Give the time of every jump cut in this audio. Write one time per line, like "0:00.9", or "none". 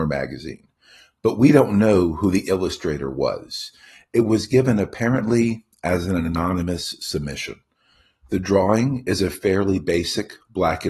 none